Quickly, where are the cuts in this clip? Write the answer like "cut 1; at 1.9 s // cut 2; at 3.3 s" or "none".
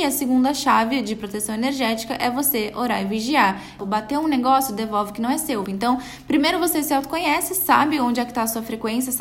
cut 1; at 3.8 s // cut 2; at 5.6 s